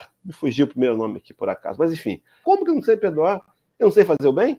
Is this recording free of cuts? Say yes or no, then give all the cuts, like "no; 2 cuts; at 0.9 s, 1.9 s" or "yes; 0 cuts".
no; 1 cut; at 2.4 s